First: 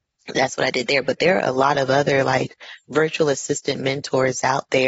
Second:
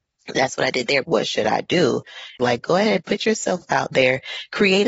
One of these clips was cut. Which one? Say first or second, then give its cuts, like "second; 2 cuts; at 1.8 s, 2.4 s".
second; 2 cuts; at 1.0 s, 2.4 s